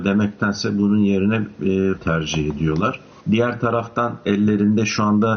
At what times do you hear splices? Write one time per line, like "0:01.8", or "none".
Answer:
0:02.0
0:03.2

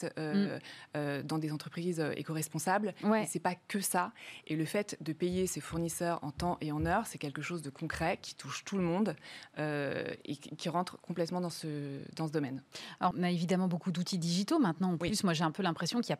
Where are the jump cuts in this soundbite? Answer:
0:04.4
0:13.1

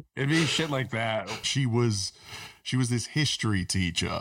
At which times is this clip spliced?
0:01.4

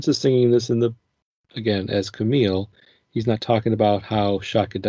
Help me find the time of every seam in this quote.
none

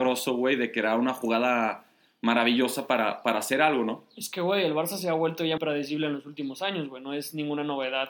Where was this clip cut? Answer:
0:05.6

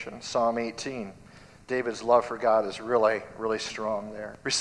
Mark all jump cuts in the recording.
none

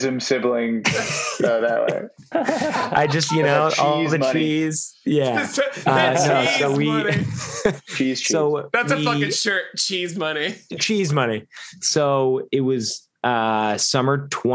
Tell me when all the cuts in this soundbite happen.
none

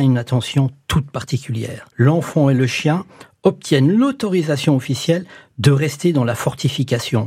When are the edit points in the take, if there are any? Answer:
0:01.9

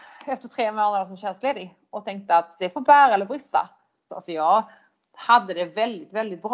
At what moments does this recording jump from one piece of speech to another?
0:04.1

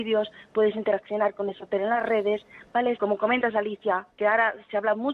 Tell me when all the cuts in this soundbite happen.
0:02.9
0:04.1

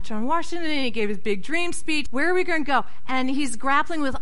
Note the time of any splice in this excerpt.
0:02.1

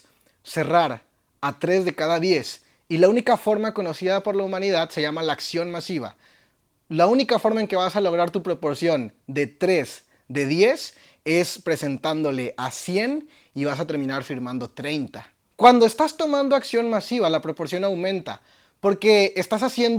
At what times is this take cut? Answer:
0:15.4

